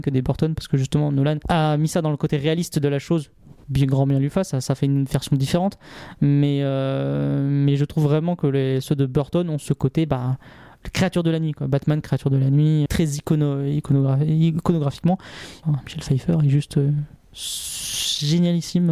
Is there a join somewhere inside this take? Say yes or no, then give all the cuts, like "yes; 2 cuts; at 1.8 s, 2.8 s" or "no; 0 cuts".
yes; 2 cuts; at 12.9 s, 15.6 s